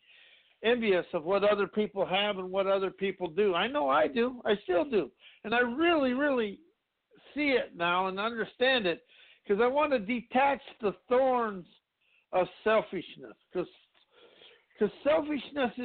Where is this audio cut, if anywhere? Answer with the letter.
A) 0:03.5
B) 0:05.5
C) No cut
C